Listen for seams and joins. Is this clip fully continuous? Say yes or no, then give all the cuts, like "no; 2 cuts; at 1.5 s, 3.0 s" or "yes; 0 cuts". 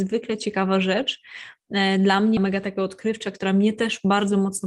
no; 1 cut; at 2.4 s